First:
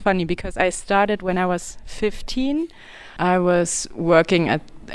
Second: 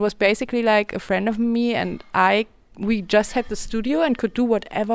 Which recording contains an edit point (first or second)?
first